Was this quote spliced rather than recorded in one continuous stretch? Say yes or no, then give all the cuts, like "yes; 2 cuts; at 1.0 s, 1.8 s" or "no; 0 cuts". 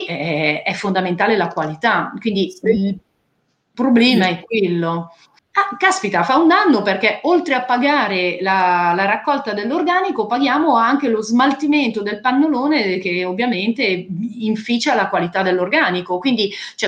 yes; 1 cut; at 5.4 s